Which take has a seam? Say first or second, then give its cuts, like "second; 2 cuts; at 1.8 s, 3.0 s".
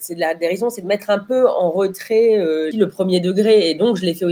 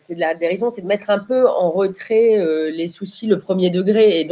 first; 1 cut; at 2.7 s